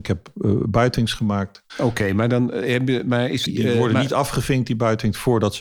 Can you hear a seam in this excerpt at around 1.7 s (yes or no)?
yes